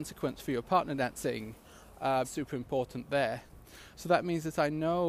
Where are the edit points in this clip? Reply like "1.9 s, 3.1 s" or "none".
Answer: 2.2 s, 3.9 s